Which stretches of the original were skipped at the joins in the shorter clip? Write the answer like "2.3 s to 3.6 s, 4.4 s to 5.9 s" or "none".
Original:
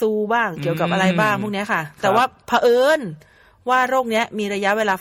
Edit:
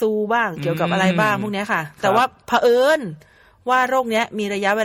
none